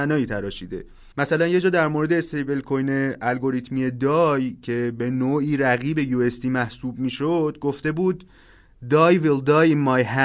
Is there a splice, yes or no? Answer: yes